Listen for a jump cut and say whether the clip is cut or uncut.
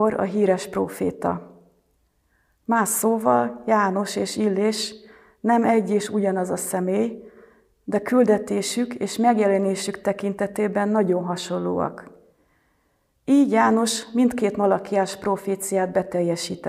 uncut